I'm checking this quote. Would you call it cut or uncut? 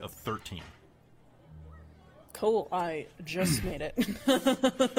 uncut